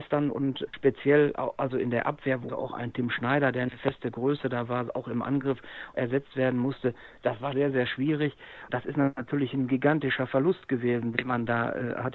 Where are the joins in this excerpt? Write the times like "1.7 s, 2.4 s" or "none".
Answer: 2.5 s, 7.5 s, 8.7 s